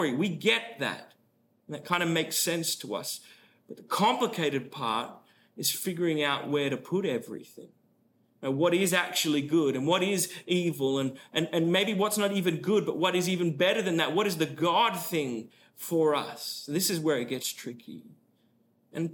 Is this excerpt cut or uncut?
uncut